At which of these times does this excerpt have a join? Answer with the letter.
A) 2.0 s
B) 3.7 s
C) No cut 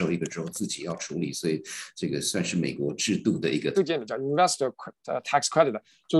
B